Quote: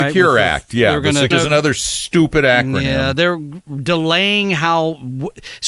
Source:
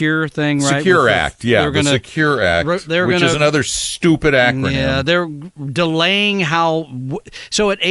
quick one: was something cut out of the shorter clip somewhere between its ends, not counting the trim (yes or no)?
yes